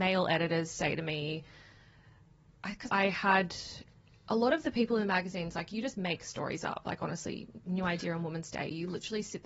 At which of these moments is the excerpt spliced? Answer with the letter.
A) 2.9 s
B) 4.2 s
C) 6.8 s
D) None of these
A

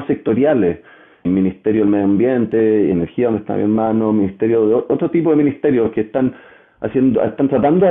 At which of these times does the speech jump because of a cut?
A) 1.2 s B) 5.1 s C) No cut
A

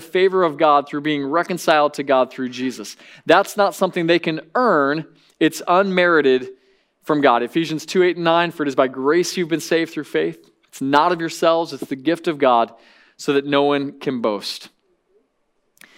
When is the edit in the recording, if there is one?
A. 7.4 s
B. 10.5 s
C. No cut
C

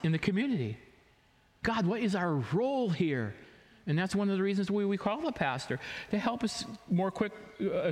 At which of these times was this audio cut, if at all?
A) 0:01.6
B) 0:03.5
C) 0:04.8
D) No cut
A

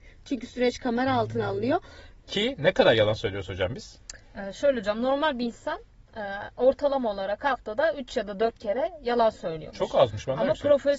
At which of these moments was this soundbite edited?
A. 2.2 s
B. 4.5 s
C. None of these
A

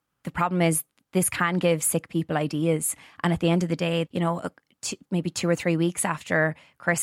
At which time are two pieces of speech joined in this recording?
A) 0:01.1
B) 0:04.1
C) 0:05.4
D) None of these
B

